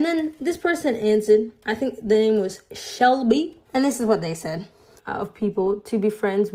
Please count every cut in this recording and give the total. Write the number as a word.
two